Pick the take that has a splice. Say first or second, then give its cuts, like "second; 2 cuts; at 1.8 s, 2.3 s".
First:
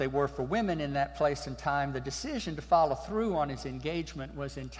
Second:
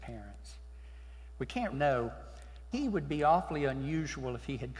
second; 2 cuts; at 1.7 s, 2.7 s